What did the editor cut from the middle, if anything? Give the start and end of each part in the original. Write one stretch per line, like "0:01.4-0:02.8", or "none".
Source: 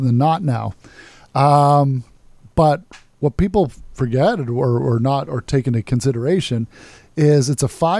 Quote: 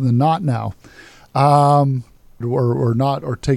0:02.4-0:04.5